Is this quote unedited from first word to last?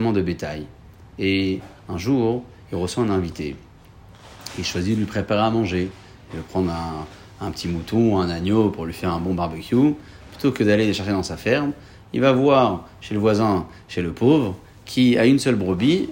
yes; 0 cuts

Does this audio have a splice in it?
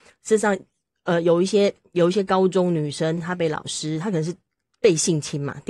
no; 0 cuts

